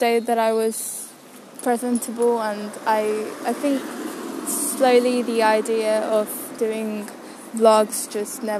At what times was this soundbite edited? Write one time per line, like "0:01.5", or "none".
none